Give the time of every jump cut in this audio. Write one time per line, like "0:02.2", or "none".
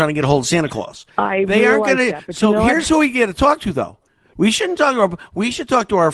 none